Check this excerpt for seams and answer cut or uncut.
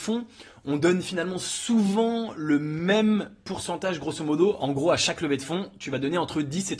uncut